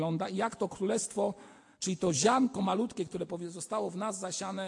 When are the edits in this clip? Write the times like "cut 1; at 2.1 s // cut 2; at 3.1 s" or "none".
none